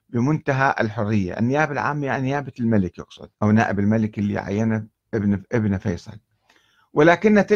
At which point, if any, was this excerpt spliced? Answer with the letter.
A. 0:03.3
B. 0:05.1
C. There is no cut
A